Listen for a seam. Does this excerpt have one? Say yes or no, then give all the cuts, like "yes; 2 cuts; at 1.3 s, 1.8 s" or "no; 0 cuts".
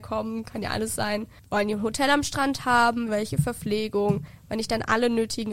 yes; 1 cut; at 3.1 s